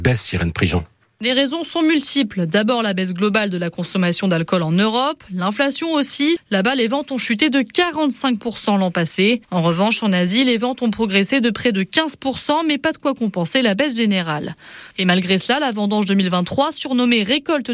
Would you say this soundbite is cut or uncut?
cut